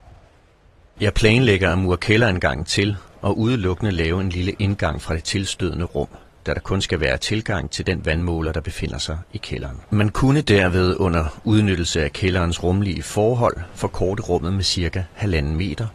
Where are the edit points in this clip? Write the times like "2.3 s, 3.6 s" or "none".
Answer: 1.0 s, 9.9 s